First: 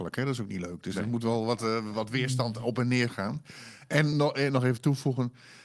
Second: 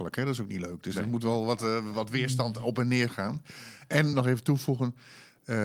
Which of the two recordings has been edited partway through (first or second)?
second